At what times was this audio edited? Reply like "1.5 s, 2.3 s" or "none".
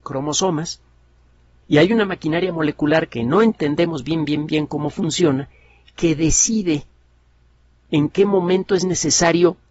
1.6 s